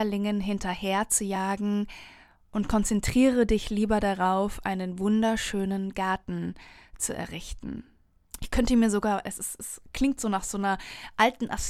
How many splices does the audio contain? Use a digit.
1